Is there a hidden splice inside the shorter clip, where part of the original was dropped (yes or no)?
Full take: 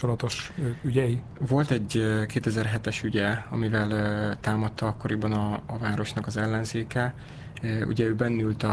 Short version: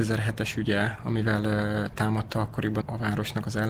yes